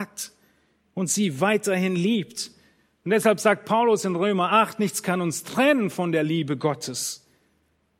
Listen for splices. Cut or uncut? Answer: uncut